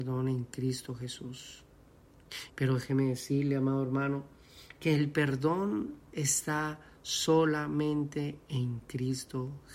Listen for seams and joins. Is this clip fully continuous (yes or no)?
no